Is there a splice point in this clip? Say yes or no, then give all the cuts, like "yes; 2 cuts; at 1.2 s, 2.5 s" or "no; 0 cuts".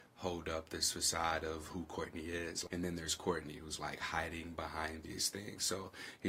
yes; 1 cut; at 2.7 s